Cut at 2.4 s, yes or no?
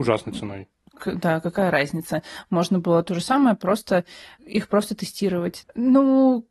no